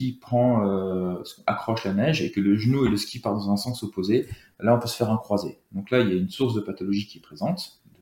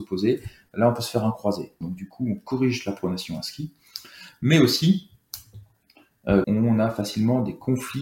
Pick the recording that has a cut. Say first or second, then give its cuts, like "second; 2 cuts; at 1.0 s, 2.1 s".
second; 2 cuts; at 1.8 s, 6.4 s